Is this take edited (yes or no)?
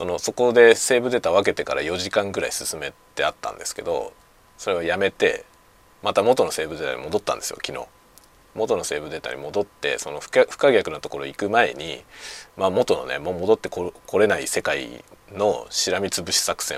no